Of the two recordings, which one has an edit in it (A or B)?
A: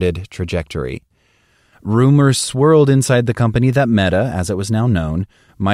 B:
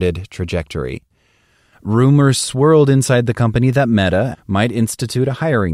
B